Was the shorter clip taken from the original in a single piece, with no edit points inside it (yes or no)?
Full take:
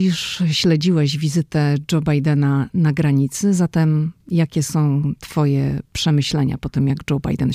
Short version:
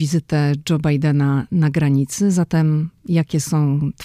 yes